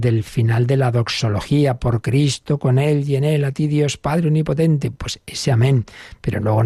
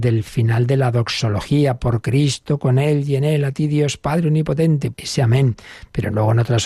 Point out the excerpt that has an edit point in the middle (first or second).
second